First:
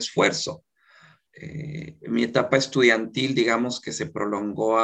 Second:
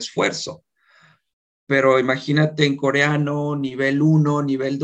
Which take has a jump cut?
first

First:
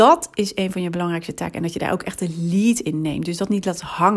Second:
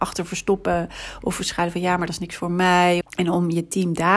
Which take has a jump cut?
second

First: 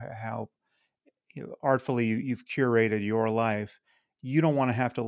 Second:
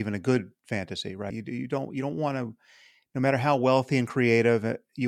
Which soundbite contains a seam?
second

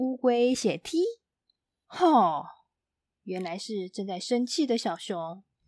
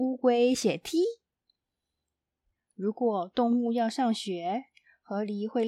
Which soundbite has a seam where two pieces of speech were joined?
first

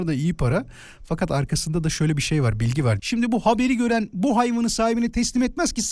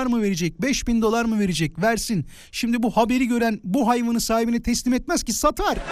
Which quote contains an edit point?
first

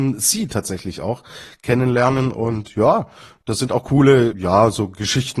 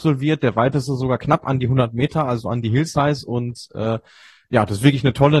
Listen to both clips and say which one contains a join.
first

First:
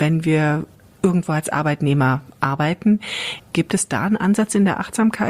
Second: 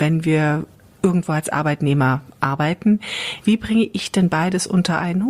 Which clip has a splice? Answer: first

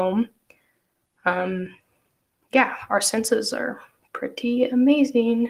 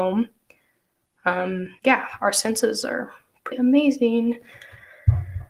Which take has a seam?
second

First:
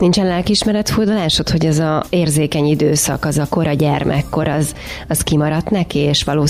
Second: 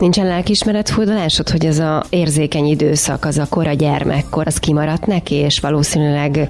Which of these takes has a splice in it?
second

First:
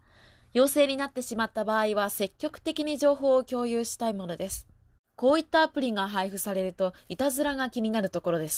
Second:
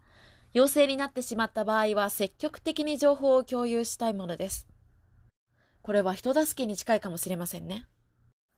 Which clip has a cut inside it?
first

